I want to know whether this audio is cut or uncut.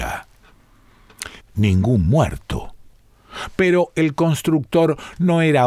cut